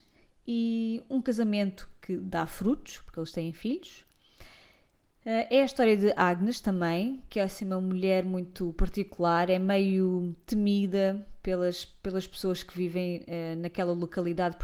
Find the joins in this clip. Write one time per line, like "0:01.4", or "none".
none